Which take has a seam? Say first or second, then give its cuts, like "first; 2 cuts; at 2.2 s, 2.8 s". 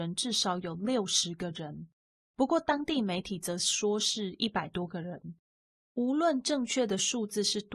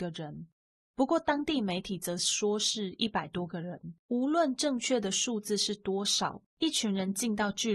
second; 2 cuts; at 4.0 s, 6.5 s